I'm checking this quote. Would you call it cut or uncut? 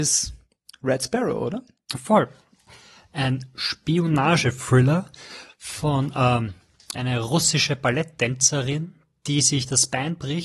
cut